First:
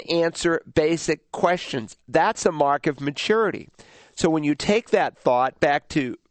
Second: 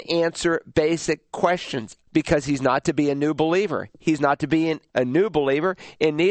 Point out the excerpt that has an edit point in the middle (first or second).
second